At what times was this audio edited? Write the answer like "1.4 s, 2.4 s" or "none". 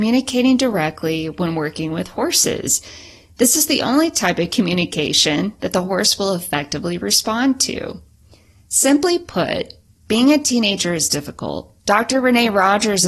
11.8 s